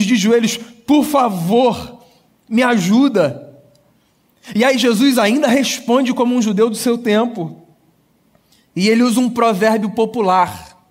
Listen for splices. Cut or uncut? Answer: uncut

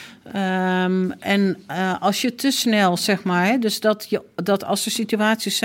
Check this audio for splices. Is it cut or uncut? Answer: uncut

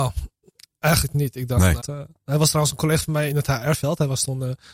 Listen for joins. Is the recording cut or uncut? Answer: cut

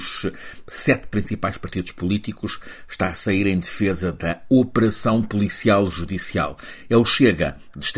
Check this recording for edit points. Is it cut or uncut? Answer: uncut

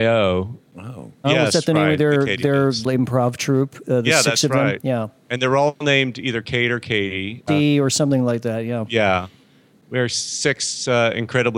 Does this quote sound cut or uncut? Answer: cut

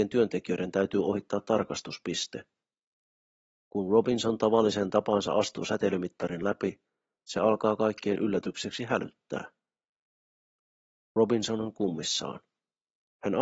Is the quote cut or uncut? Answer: uncut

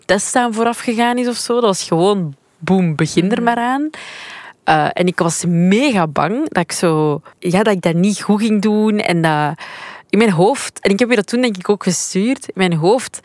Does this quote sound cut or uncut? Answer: uncut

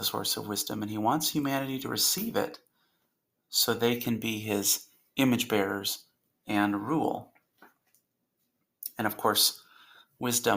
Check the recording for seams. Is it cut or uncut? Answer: uncut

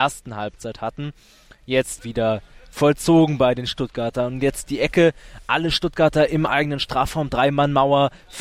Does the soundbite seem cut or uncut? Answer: cut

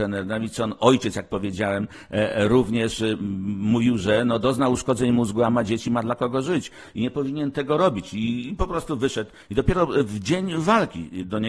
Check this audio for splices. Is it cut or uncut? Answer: uncut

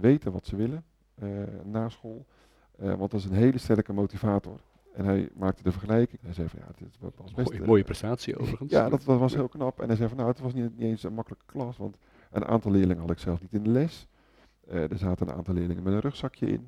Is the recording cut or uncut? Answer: cut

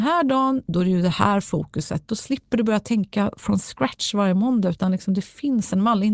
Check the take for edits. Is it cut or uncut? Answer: uncut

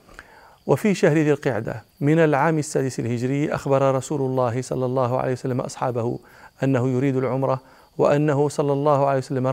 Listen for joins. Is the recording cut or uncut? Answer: cut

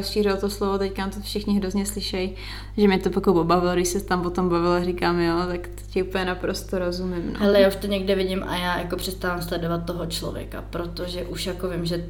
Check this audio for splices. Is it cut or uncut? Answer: uncut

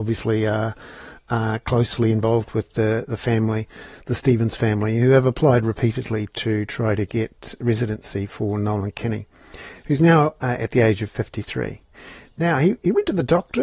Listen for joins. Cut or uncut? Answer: uncut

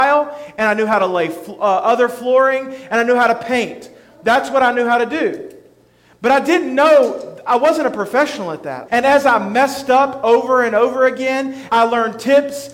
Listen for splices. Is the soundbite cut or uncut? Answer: cut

